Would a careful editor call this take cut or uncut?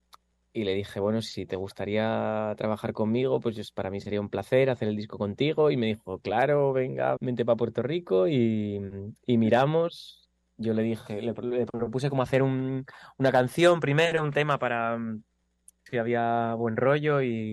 cut